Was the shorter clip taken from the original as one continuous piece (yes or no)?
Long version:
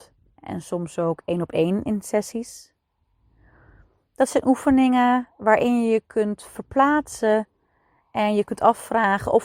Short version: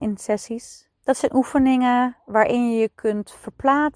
no